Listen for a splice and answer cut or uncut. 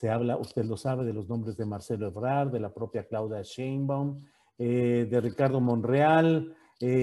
uncut